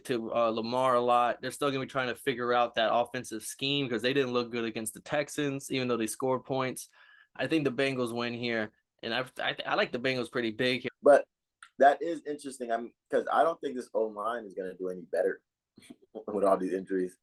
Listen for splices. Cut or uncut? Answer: cut